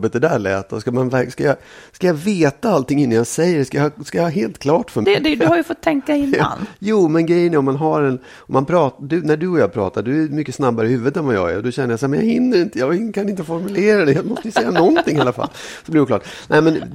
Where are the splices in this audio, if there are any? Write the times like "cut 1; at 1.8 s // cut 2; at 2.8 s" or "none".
cut 1; at 5.0 s

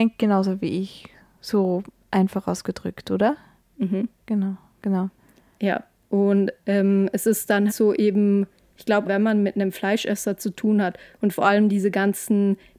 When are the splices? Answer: cut 1; at 7.7 s // cut 2; at 9.0 s

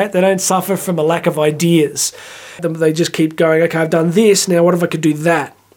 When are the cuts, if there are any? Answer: cut 1; at 2.6 s

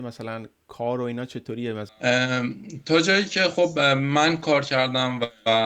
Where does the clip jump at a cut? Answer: none

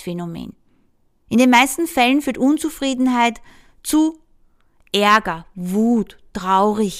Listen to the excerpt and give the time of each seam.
cut 1; at 1.3 s

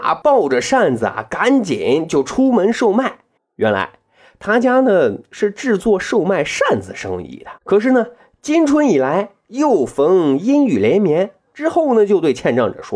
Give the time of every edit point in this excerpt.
cut 1; at 3.4 s // cut 2; at 7.6 s // cut 3; at 11.5 s

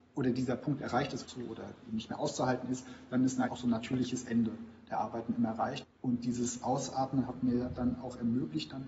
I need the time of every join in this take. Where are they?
cut 1; at 1.2 s // cut 2; at 3.5 s // cut 3; at 5.8 s

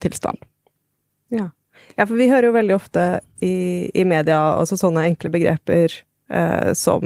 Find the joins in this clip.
none

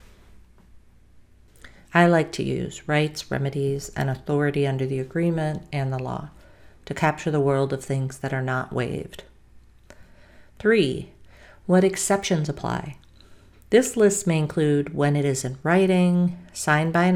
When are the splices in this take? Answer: cut 1; at 1.8 s // cut 2; at 13.5 s

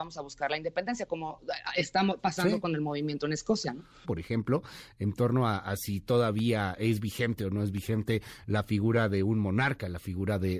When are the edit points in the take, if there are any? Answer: cut 1; at 4.0 s

